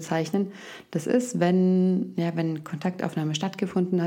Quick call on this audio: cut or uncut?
uncut